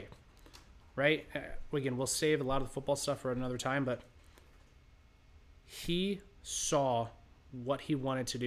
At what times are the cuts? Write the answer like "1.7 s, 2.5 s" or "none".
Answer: none